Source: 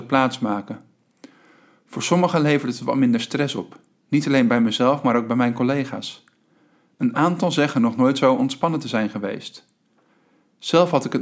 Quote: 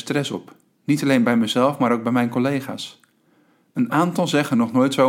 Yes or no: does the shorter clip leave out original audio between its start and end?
no